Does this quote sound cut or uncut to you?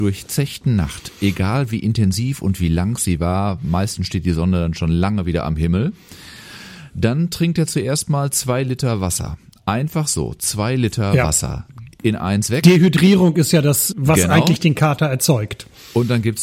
cut